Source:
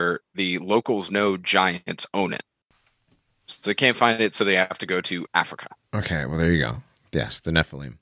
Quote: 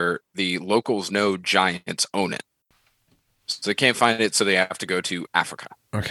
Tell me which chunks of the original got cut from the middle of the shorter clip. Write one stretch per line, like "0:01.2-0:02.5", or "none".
none